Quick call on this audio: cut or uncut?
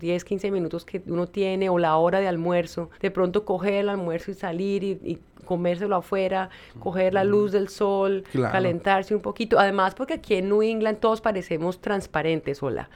cut